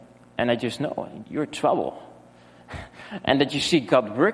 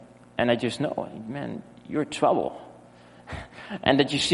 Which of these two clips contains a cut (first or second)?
first